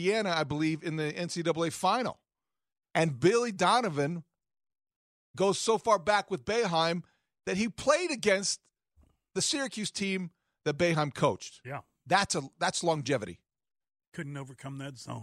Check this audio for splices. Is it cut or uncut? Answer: uncut